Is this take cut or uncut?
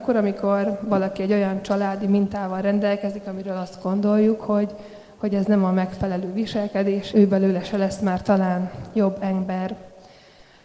cut